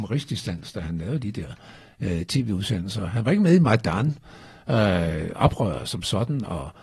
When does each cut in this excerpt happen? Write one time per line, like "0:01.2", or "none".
none